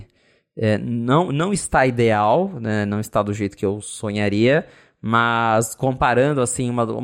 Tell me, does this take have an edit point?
no; 0 cuts

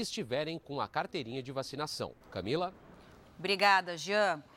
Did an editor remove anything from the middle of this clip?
yes; 1 cut; at 2.2 s

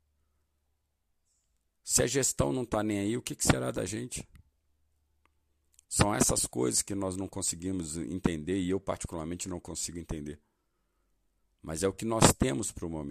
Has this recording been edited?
yes; 1 cut; at 5.8 s

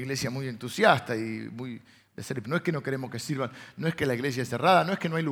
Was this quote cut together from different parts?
yes; 1 cut; at 2.4 s

